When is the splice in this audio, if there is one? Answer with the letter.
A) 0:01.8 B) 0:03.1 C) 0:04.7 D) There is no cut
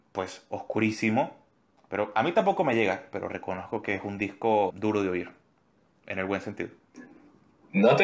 C